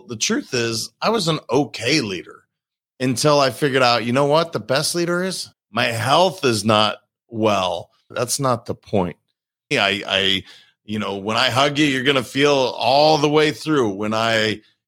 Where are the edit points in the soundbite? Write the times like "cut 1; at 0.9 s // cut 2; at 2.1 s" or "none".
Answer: cut 1; at 5.5 s // cut 2; at 8.1 s // cut 3; at 9.7 s